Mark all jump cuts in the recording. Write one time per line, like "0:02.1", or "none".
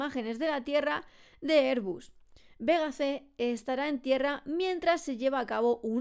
none